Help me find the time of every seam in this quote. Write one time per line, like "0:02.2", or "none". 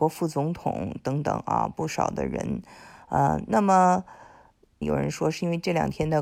0:04.8